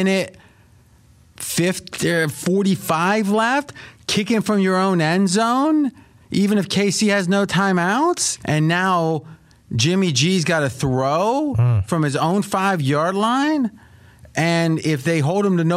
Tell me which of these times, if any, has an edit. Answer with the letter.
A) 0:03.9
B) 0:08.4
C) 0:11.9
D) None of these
B